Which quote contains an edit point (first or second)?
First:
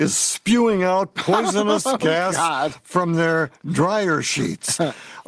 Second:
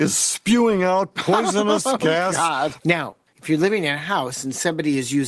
second